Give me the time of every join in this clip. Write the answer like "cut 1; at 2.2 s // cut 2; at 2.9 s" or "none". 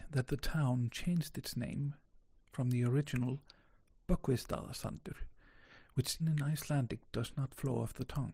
cut 1; at 6.2 s